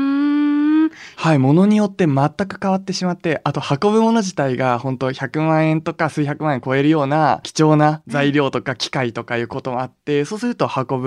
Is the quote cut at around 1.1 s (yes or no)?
yes